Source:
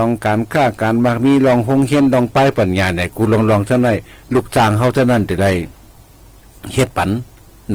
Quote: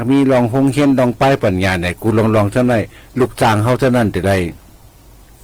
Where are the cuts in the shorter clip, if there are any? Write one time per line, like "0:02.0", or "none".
none